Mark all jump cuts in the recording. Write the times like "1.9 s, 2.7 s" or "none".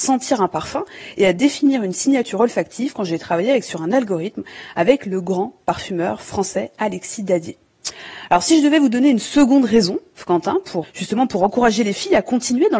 10.8 s